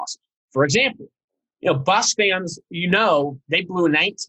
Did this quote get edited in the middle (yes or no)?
no